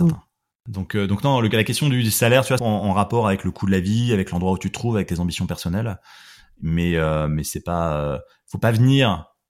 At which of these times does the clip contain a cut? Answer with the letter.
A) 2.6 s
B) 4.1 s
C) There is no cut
A